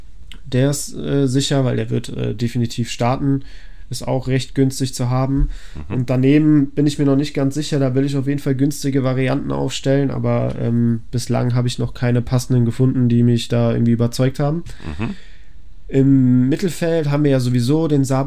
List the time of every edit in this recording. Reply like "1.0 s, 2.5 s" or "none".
none